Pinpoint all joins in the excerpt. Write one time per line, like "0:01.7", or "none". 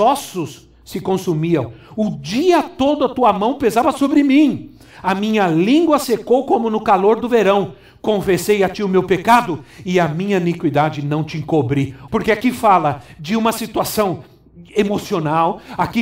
0:12.1